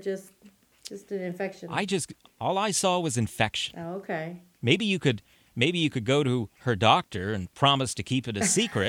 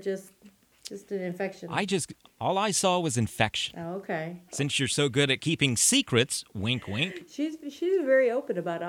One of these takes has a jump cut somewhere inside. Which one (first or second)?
second